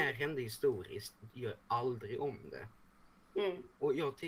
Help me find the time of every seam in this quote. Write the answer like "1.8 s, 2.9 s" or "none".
1.3 s